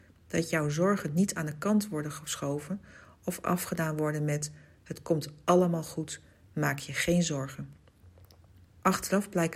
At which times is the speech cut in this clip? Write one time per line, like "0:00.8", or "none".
0:08.7